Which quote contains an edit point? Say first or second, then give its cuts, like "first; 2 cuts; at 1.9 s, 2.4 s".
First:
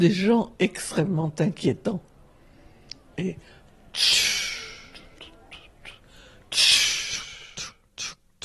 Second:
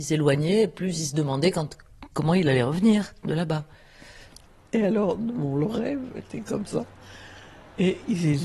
first; 1 cut; at 3.1 s